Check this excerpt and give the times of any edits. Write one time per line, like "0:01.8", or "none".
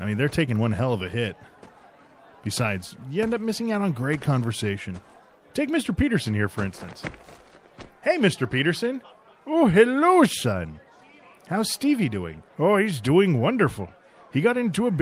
0:12.5